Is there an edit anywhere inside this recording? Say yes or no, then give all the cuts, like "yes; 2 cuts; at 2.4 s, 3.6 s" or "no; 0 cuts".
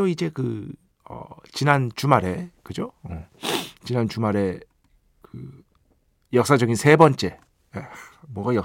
no; 0 cuts